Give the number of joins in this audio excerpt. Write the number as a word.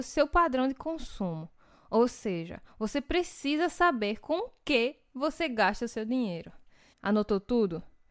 one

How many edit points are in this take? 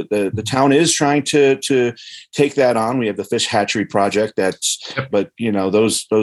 one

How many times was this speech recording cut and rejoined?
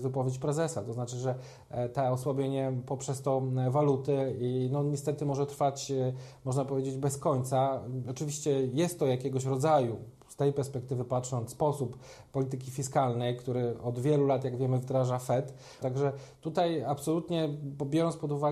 one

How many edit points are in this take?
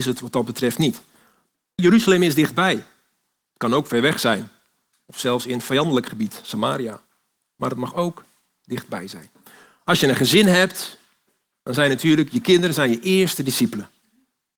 one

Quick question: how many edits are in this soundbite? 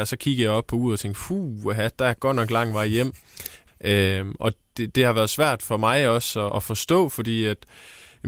two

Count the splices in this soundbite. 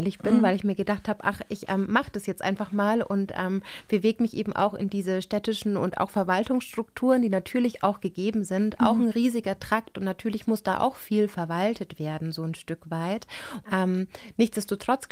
two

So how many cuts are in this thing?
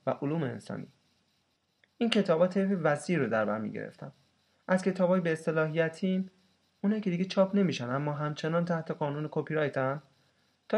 zero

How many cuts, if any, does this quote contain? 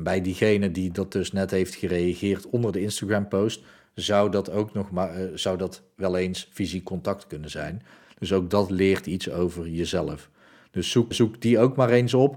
one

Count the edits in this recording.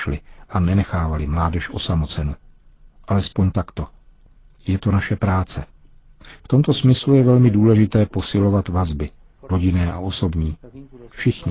two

